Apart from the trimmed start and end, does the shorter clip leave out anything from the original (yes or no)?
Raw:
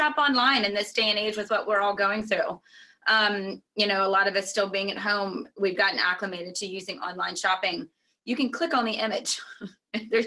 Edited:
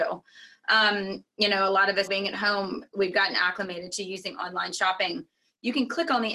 yes